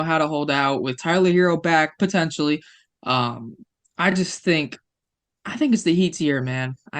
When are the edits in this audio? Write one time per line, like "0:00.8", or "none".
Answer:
none